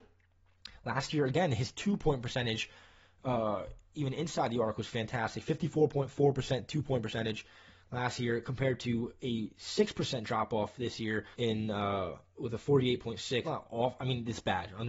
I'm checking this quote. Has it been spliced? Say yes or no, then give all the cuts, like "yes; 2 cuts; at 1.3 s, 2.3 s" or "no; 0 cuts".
yes; 2 cuts; at 11.3 s, 13.4 s